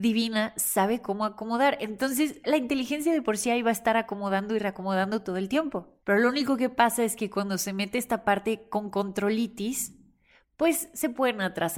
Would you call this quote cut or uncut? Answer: uncut